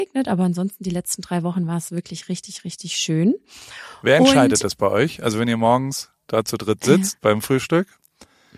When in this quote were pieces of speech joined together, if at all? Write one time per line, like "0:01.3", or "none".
0:07.2